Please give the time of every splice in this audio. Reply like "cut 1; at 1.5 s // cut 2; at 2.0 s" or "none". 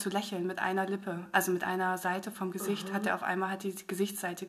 none